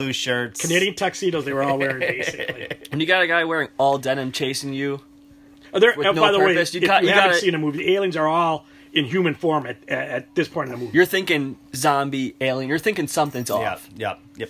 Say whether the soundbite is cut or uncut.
uncut